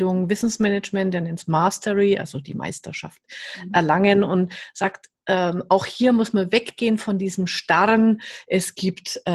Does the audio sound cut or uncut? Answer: uncut